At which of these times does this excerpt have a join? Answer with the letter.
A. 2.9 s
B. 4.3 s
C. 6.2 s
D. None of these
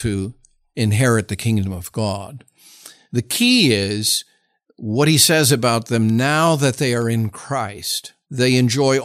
D